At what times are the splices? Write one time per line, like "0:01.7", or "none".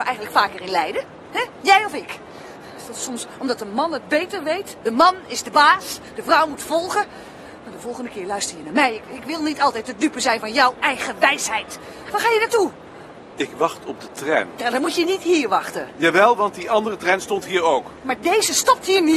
0:12.0